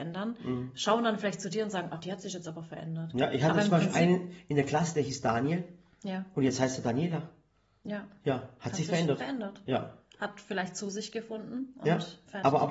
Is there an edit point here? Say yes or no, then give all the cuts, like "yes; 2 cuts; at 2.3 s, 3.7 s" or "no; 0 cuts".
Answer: no; 0 cuts